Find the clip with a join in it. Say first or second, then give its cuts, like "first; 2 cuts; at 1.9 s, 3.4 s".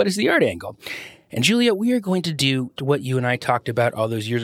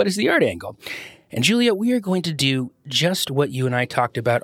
first; 1 cut; at 2.8 s